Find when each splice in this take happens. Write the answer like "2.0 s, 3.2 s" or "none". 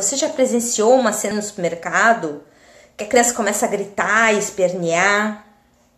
1.3 s